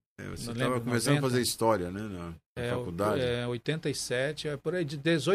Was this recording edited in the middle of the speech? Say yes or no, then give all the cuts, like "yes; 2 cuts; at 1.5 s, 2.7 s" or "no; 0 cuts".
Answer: yes; 1 cut; at 2.5 s